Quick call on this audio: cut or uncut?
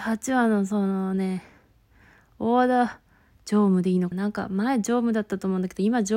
cut